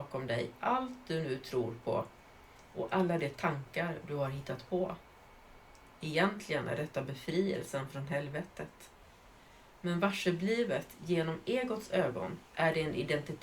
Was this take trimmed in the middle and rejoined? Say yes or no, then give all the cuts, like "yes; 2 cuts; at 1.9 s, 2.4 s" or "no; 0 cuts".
yes; 1 cut; at 12.5 s